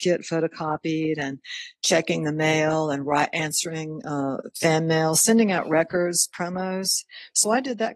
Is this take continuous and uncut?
yes; 0 cuts

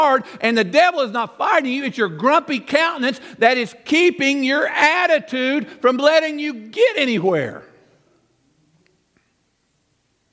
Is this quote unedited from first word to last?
yes; 0 cuts

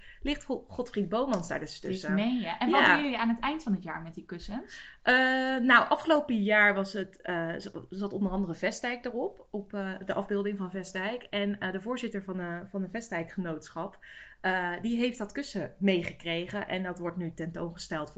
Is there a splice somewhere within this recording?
no; 0 cuts

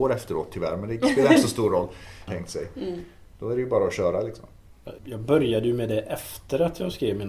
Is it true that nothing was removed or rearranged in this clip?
no; 2 cuts; at 2.3 s, 5.0 s

